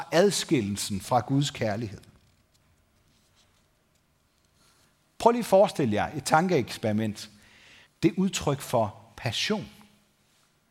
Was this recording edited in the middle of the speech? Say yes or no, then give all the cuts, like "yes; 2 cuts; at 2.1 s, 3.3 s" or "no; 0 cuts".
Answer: yes; 1 cut; at 7.9 s